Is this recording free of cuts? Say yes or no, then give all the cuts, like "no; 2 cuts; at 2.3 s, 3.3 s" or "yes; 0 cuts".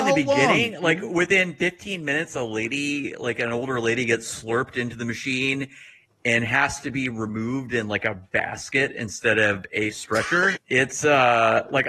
no; 1 cut; at 10.6 s